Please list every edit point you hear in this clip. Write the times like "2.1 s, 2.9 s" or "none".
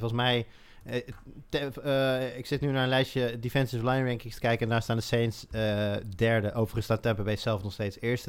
none